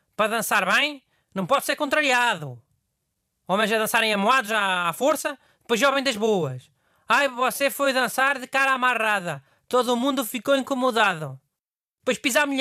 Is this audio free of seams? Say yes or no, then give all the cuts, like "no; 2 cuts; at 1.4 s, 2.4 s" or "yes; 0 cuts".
yes; 0 cuts